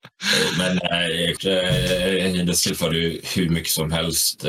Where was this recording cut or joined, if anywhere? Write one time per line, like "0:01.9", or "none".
0:01.4